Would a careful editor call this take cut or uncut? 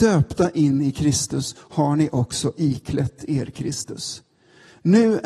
uncut